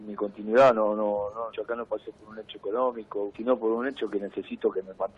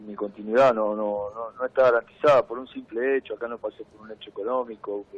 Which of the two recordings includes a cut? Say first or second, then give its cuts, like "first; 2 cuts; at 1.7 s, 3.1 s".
first; 2 cuts; at 1.5 s, 3.3 s